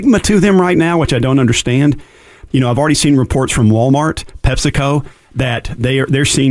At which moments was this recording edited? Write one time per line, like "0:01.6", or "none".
0:02.5